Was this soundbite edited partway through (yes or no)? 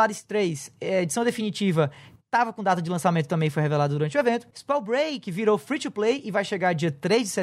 no